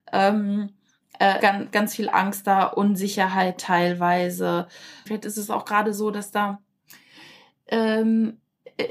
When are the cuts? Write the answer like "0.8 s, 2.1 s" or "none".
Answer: 1.4 s, 5.1 s